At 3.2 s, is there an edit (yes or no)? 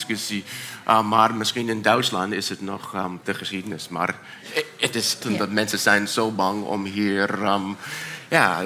yes